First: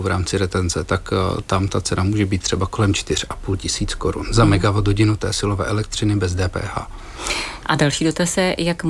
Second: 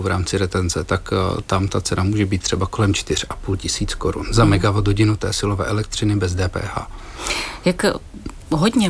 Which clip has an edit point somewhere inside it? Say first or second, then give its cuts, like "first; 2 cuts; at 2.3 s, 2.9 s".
first; 1 cut; at 7.6 s